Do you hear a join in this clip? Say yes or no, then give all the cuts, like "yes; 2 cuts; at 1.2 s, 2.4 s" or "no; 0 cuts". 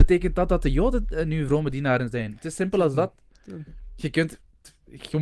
no; 0 cuts